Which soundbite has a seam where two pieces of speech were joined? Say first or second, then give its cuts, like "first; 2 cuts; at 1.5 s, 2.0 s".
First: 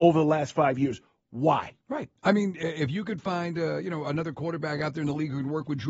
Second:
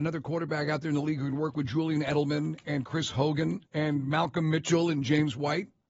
second; 1 cut; at 3.7 s